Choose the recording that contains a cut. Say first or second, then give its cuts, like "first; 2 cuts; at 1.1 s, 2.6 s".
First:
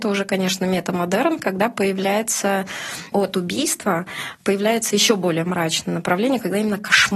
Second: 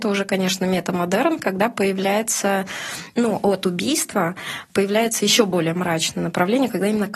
first; 1 cut; at 3.1 s